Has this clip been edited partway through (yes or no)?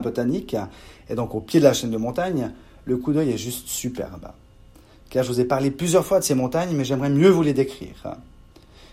no